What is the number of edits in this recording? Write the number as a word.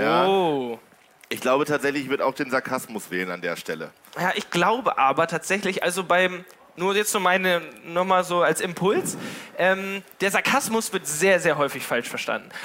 zero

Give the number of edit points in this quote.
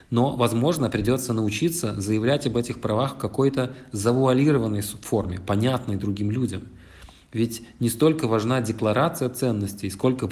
zero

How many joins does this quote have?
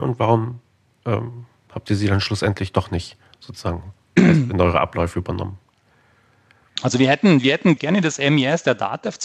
one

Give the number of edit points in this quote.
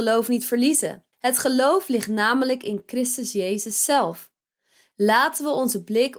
one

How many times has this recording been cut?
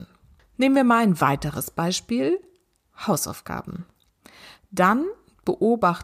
one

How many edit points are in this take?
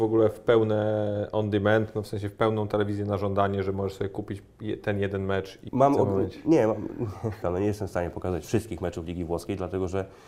two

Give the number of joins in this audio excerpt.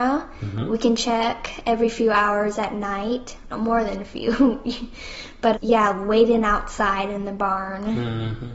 two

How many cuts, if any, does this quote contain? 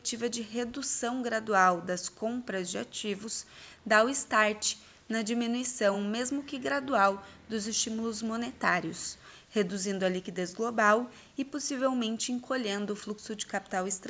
zero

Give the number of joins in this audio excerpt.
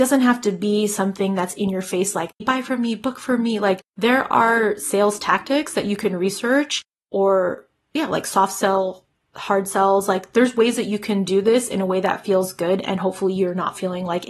one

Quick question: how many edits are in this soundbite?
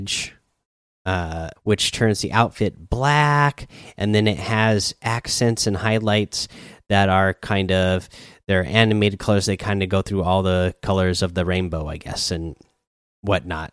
one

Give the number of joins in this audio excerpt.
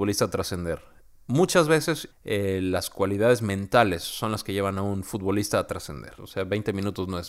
two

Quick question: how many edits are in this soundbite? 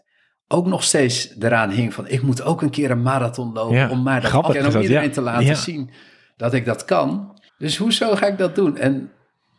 two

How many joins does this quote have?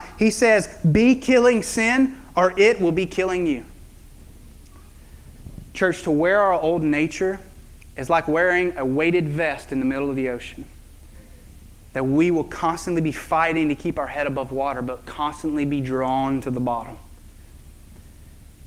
one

